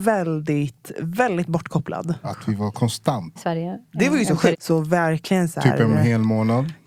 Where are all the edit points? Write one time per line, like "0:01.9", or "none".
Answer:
0:02.2
0:03.4
0:04.5